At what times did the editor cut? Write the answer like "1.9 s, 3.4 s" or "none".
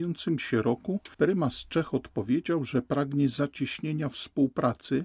1.1 s